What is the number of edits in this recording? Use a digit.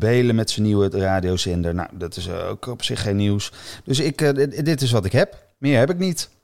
0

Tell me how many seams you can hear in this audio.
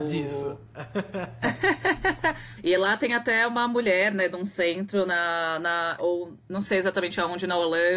2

